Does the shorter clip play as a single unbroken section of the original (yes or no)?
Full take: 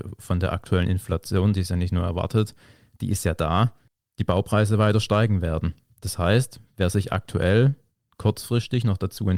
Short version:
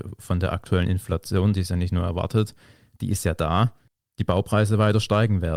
yes